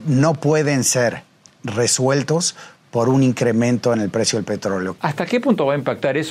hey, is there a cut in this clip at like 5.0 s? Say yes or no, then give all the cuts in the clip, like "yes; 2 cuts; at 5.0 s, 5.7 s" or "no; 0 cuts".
yes; 1 cut; at 5.0 s